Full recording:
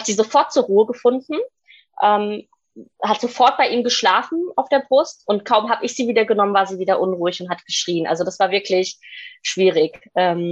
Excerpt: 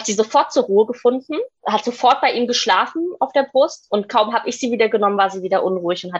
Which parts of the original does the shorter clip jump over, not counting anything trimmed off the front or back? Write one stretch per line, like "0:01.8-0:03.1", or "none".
0:01.6-0:02.9